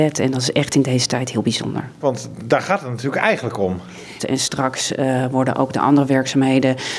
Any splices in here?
yes; 2 cuts; at 2.0 s, 4.2 s

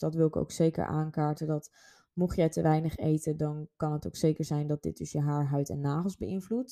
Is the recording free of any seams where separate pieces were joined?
yes; 0 cuts

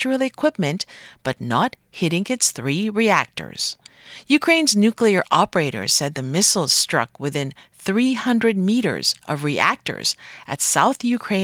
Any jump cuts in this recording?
yes; 1 cut; at 4.2 s

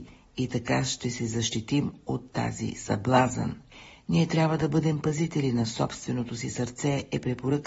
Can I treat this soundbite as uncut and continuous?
yes; 0 cuts

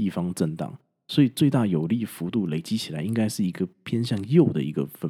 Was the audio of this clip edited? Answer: no; 0 cuts

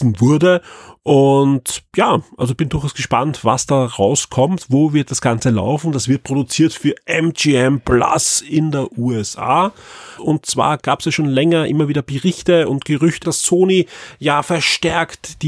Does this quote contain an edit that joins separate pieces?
yes; 3 cuts; at 2.6 s, 10.2 s, 13.2 s

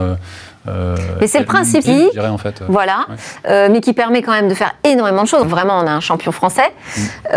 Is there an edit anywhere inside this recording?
yes; 2 cuts; at 1.8 s, 5.4 s

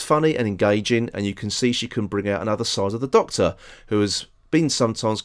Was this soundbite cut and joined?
no; 0 cuts

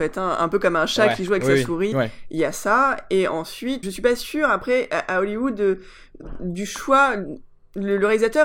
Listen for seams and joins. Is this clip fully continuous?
no; 2 cuts; at 1.9 s, 3.8 s

